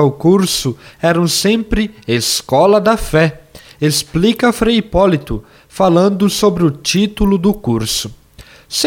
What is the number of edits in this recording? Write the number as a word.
zero